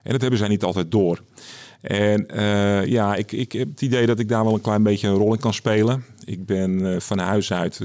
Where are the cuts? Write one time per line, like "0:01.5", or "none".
none